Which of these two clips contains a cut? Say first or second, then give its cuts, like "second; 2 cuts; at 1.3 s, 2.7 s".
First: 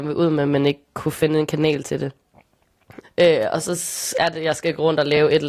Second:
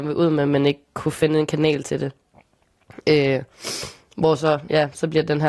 first; 1 cut; at 3.0 s